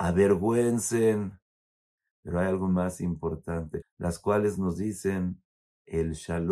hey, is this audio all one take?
no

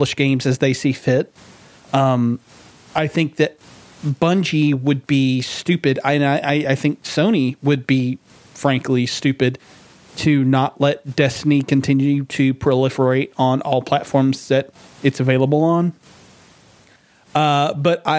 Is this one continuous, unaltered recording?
yes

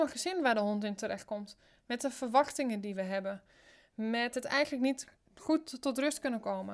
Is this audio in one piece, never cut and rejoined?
yes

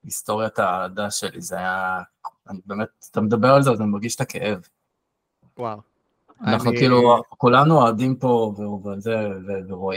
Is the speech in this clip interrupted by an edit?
no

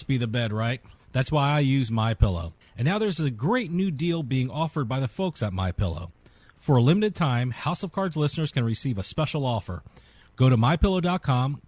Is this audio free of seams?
no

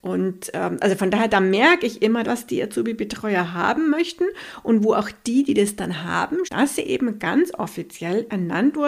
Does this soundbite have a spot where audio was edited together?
yes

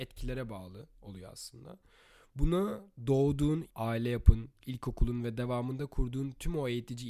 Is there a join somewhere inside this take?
yes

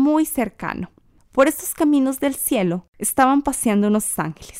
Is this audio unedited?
yes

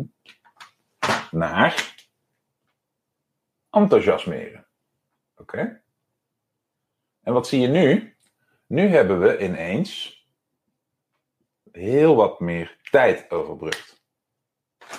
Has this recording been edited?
no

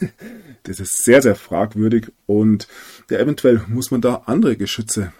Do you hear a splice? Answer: no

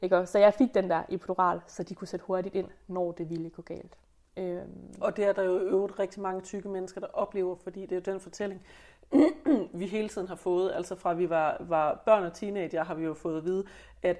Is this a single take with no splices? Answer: yes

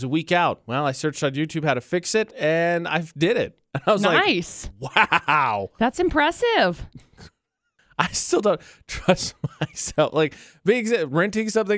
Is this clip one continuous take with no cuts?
yes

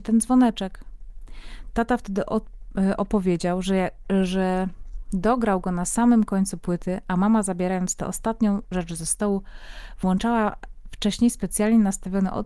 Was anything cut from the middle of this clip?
no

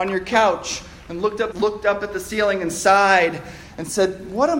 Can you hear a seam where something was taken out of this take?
yes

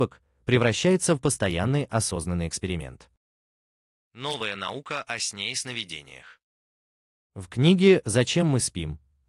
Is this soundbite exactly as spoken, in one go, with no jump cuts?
no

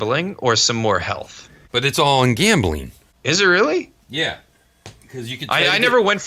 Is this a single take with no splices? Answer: yes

